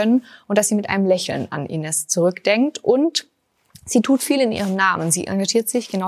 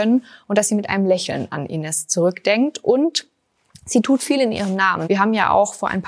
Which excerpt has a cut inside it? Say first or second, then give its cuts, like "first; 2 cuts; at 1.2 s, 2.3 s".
second; 1 cut; at 5.0 s